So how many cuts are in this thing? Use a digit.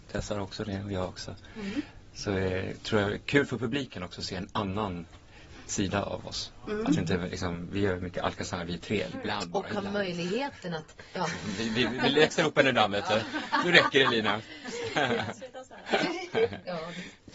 2